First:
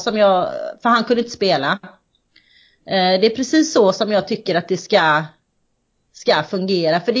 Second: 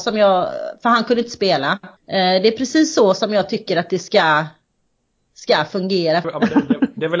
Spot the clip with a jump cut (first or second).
second